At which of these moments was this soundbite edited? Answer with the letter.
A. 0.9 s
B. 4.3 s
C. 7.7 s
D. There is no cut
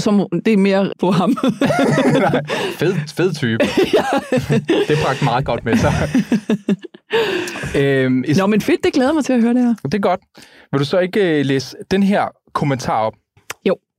A